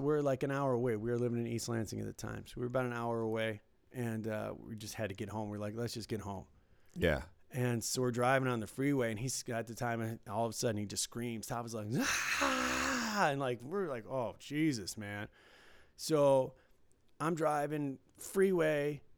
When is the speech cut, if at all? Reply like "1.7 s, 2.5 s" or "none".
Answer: none